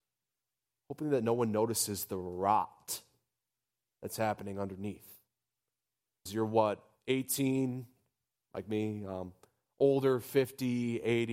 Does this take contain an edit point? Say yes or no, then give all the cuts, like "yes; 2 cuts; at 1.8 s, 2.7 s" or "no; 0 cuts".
yes; 2 cuts; at 6.3 s, 8.4 s